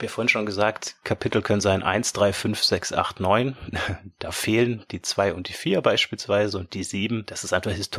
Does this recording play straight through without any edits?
yes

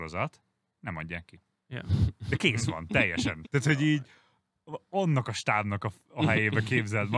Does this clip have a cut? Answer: yes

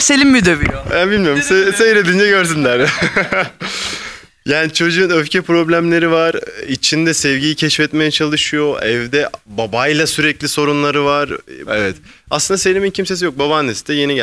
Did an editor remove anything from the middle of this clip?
yes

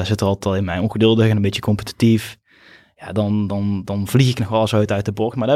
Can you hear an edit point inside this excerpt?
no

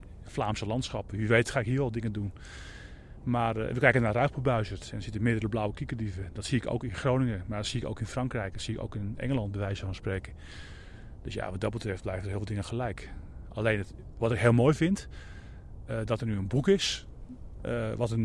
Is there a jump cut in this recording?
no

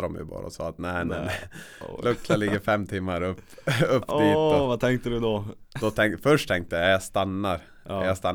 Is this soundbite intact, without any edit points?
yes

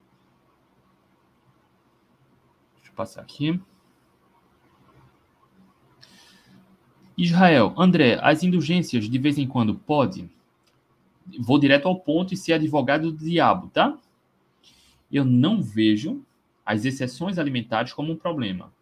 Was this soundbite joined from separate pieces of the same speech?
no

